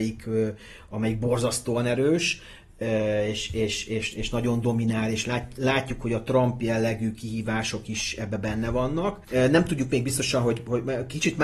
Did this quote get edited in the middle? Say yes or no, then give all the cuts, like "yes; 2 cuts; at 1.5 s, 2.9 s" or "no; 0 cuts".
yes; 1 cut; at 9.2 s